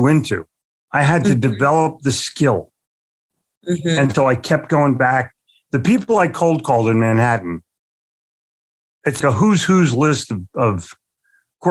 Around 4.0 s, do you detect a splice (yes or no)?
no